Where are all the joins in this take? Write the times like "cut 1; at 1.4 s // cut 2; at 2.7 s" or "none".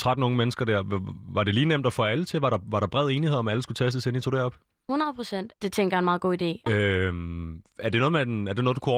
cut 1; at 5.5 s // cut 2; at 6.7 s